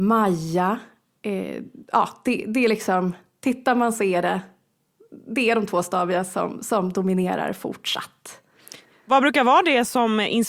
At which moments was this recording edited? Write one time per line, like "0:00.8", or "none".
none